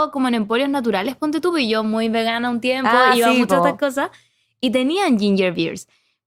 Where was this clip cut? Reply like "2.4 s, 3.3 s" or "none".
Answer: none